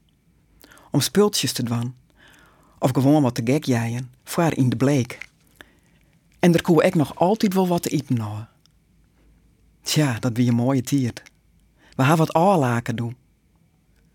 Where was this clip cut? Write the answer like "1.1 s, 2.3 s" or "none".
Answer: none